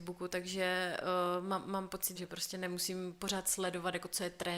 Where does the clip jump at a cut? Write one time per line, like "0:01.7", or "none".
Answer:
0:02.2